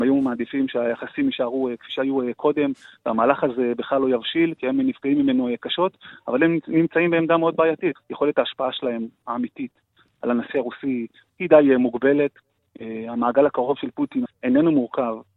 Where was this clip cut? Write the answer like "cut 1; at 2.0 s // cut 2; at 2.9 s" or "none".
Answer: cut 1; at 8.0 s // cut 2; at 14.3 s

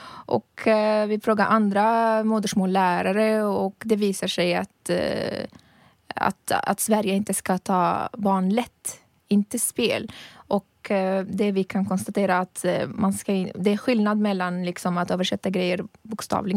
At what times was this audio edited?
none

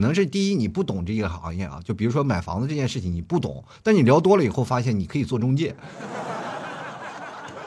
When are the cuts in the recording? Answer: none

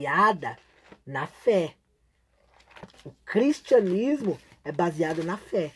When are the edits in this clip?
cut 1; at 2.9 s

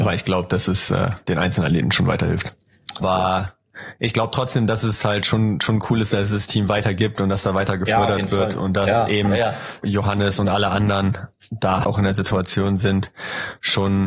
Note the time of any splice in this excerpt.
cut 1; at 3.0 s // cut 2; at 9.8 s // cut 3; at 11.8 s

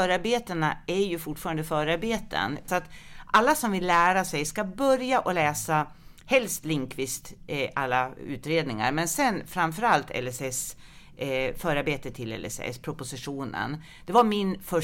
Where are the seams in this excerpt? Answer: cut 1; at 2.7 s

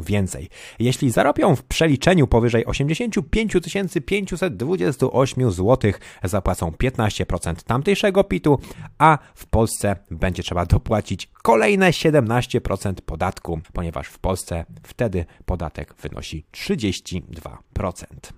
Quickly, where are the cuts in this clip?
cut 1; at 13.6 s

